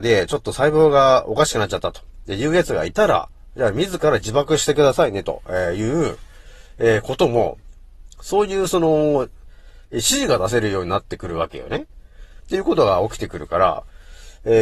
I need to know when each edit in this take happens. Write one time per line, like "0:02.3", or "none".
0:12.4

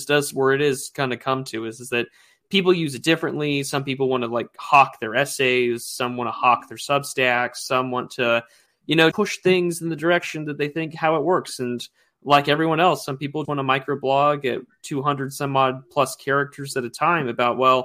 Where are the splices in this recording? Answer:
0:09.1
0:13.4

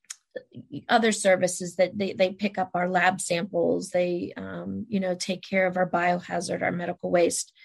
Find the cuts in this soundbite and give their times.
none

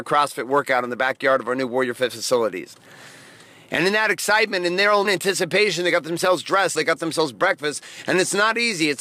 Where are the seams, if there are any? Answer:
0:05.0
0:06.7

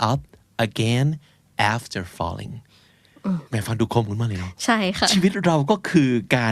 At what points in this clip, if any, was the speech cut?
0:03.5

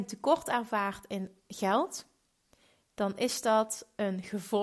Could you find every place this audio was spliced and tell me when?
none

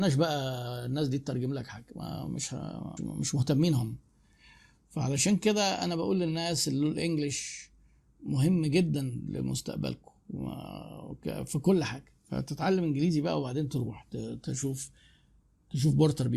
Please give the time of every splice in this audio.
0:03.0

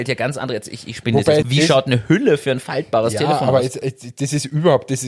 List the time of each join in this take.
0:01.4

